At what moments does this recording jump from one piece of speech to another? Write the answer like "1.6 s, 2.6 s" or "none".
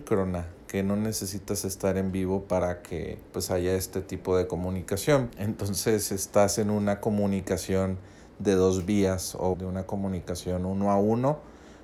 3.3 s, 5.3 s, 9.5 s

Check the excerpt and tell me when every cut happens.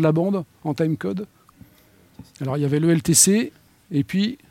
2.3 s

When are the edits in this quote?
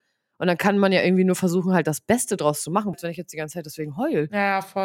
2.9 s

